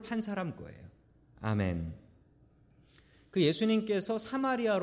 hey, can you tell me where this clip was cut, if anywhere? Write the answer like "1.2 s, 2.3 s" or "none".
1.3 s